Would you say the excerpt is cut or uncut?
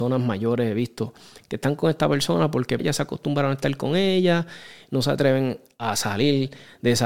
cut